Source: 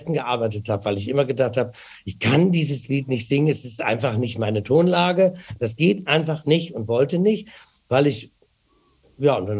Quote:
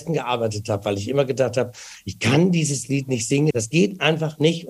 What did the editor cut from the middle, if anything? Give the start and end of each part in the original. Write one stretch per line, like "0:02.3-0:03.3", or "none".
0:03.5-0:05.6